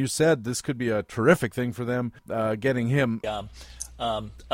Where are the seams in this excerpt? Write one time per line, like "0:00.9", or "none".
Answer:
0:02.2
0:03.2